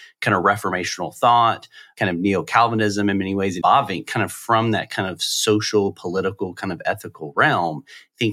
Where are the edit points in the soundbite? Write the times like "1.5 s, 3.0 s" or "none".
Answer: 3.6 s